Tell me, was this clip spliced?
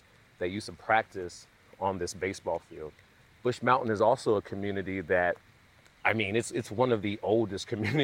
no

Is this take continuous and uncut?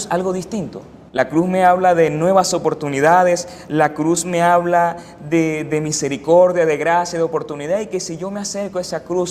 no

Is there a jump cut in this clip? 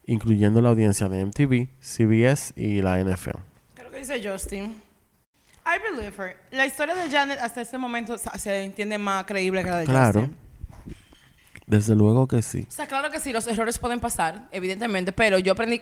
yes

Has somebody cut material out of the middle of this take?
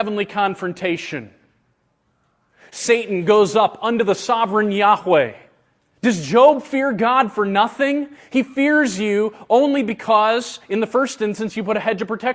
yes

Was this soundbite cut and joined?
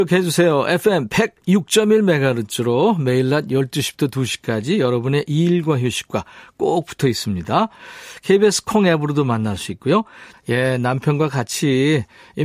yes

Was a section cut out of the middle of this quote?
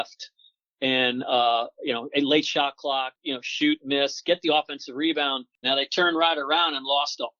yes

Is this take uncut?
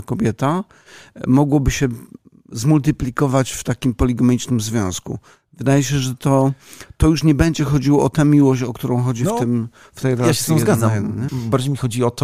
no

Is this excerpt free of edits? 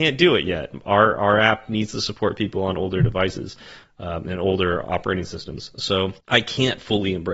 no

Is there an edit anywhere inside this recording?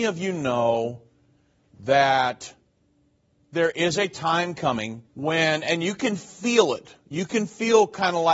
yes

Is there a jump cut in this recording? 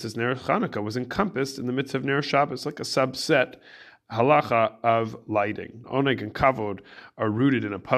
yes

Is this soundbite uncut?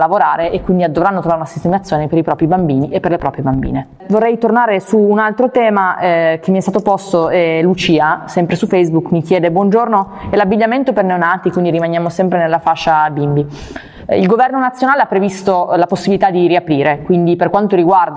yes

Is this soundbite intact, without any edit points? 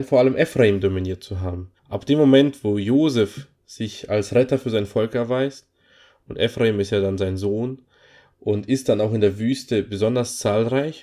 no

